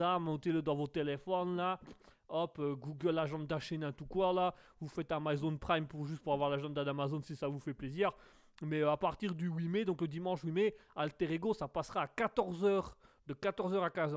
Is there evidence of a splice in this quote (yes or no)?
no